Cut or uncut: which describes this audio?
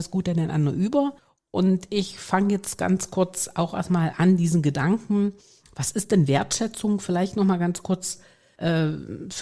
uncut